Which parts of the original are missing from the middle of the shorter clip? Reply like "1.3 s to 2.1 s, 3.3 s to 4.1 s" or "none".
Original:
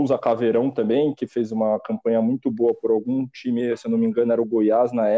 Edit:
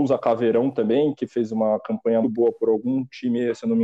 2.2 s to 2.4 s